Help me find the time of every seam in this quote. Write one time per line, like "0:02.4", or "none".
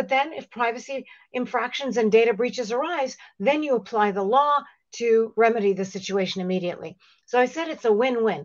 none